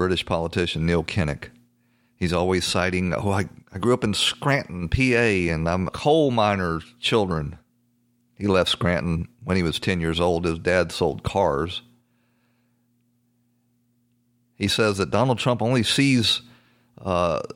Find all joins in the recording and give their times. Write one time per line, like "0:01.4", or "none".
0:05.9